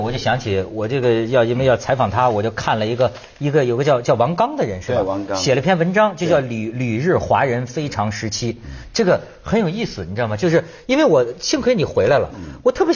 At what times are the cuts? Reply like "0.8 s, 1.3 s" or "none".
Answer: none